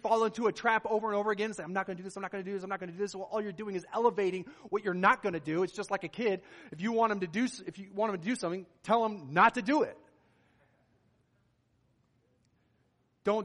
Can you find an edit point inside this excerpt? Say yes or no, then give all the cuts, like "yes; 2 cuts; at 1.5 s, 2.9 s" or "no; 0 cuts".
no; 0 cuts